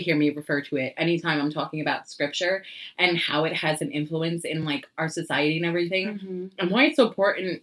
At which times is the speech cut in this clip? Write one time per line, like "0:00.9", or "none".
none